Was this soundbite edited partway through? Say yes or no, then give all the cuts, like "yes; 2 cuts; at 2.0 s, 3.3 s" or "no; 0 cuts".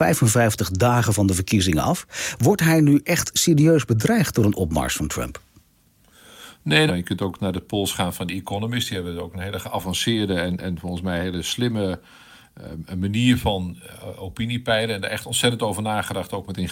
yes; 1 cut; at 6.9 s